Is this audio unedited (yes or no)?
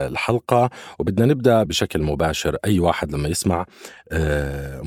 no